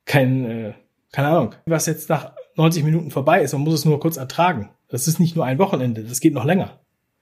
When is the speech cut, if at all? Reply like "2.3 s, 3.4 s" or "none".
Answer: 1.7 s